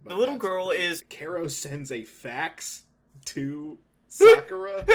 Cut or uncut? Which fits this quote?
cut